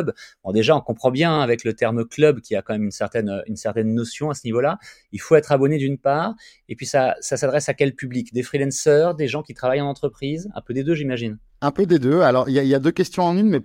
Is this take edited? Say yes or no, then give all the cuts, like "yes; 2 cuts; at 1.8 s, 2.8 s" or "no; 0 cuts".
no; 0 cuts